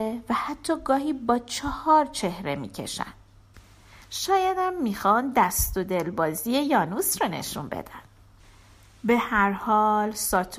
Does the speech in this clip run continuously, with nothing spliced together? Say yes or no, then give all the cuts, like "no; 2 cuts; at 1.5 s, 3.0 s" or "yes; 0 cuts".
yes; 0 cuts